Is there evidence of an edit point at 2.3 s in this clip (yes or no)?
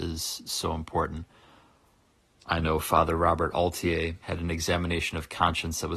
no